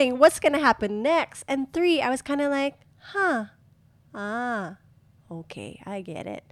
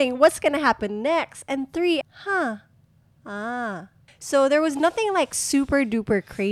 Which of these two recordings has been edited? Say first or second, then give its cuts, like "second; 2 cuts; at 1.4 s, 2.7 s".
second; 2 cuts; at 2.0 s, 4.1 s